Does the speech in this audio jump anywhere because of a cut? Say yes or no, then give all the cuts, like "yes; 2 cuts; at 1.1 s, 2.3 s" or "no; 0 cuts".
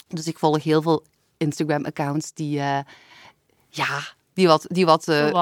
no; 0 cuts